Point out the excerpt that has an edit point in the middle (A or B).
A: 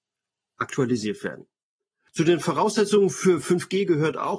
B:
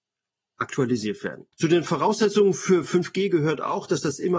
B